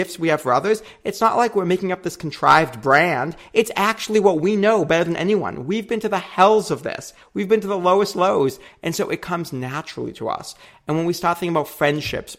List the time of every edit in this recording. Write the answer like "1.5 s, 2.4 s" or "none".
none